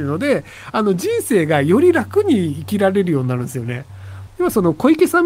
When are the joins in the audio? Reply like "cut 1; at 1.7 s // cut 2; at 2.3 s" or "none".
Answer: cut 1; at 4.3 s